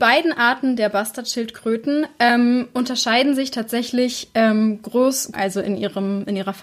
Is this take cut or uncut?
cut